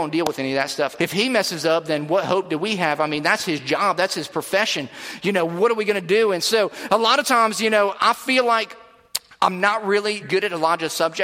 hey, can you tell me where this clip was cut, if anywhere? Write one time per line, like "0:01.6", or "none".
0:01.0
0:07.9
0:10.2